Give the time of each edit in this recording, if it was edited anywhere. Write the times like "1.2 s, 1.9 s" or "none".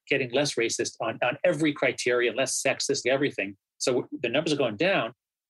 3.0 s